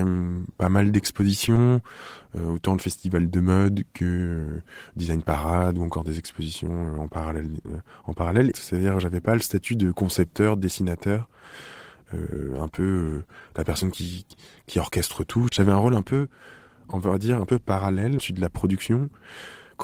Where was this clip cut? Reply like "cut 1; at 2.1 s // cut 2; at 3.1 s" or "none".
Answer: cut 1; at 8.5 s // cut 2; at 15.5 s // cut 3; at 18.2 s